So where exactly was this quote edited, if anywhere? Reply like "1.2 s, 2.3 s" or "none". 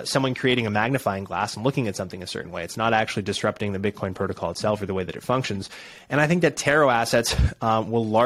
none